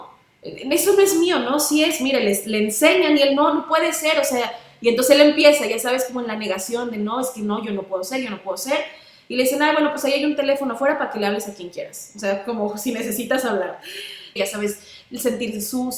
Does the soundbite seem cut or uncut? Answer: cut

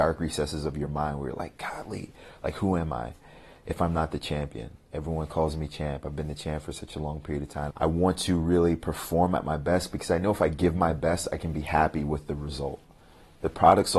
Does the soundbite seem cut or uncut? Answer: cut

